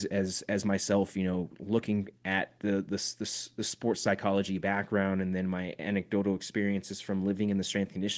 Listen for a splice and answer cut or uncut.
uncut